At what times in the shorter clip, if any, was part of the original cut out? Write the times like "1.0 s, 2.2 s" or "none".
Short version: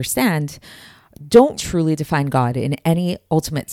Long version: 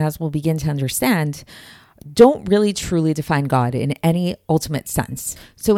1.6 s